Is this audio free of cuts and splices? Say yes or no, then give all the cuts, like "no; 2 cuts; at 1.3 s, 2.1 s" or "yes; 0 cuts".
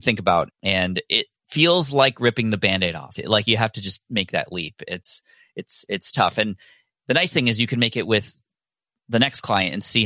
no; 2 cuts; at 1.4 s, 3.2 s